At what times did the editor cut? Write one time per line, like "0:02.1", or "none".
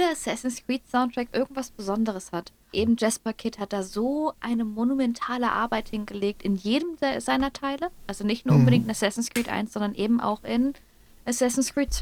0:02.7